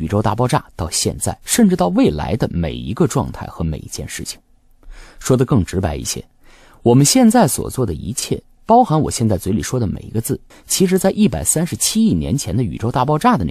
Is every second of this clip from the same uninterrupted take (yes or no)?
no